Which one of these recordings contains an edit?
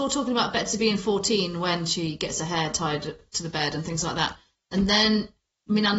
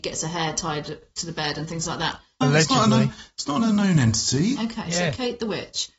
second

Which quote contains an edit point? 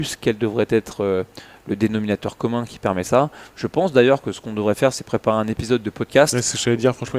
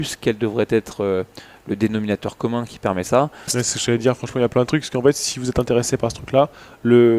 second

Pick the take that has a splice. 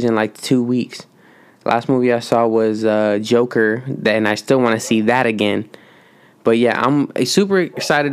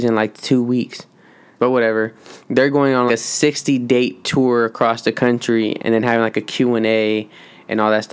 second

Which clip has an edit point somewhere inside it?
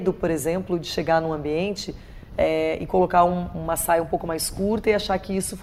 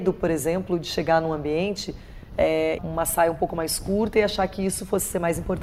second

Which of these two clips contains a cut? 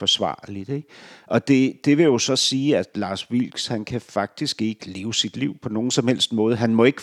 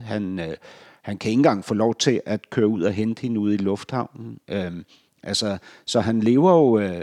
first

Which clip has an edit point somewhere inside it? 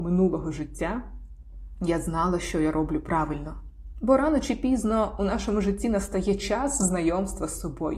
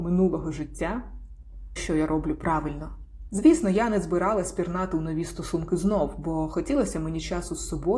second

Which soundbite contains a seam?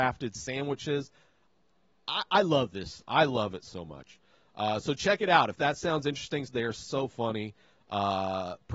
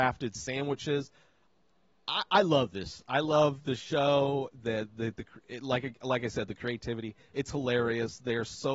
first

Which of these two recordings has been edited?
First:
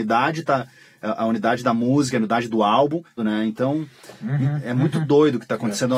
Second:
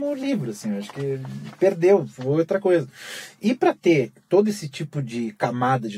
first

